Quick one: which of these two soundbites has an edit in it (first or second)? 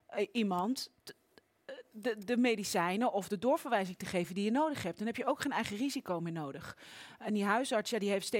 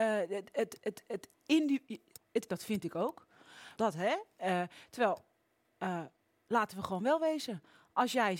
second